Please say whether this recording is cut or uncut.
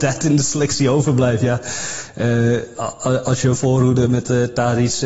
uncut